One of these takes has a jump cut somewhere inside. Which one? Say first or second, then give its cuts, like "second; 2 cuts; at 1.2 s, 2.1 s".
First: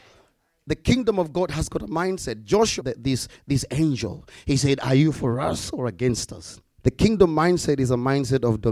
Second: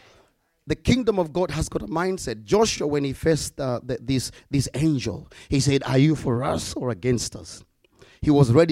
first; 2 cuts; at 2.8 s, 6.8 s